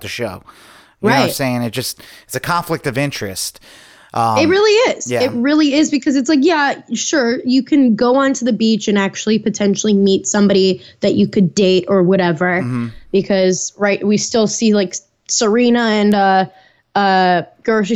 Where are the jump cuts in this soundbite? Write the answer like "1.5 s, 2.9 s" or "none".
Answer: none